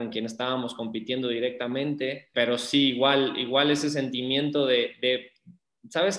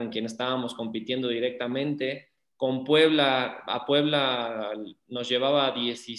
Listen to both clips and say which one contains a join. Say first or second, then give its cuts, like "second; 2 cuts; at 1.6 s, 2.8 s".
first; 1 cut; at 2.3 s